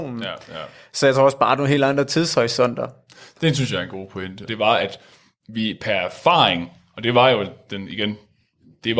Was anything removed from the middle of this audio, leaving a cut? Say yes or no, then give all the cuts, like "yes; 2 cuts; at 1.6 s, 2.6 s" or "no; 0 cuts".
yes; 1 cut; at 4.5 s